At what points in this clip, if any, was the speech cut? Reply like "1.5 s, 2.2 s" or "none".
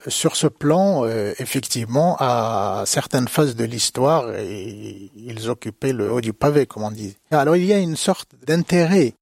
7.3 s